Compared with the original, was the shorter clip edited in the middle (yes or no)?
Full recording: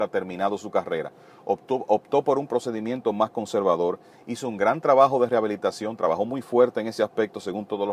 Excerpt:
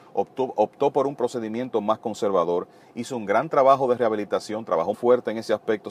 yes